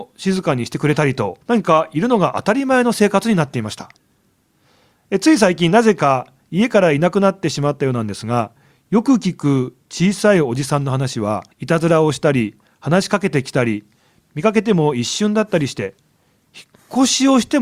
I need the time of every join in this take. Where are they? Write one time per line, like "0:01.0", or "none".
0:01.4
0:11.5